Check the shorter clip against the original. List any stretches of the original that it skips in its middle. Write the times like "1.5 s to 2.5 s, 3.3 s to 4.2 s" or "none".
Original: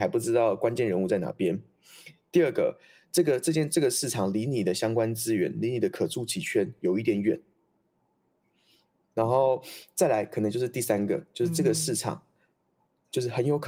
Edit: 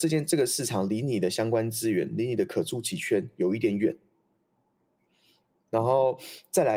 none